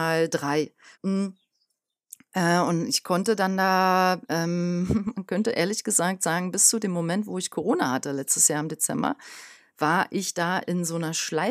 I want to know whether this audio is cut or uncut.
cut